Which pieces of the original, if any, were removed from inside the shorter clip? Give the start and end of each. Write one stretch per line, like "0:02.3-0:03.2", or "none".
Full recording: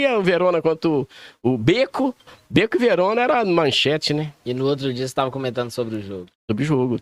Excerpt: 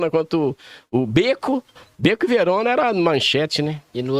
none